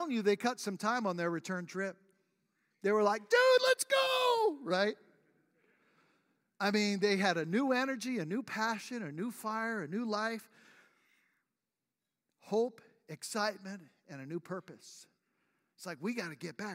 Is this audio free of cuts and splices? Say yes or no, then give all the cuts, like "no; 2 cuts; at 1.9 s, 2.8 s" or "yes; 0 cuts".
yes; 0 cuts